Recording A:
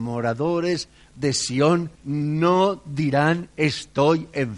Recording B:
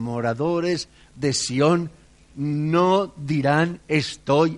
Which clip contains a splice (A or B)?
A